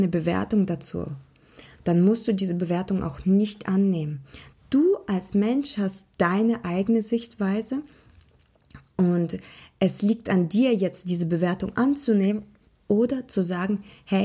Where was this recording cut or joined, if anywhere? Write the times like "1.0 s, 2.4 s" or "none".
4.5 s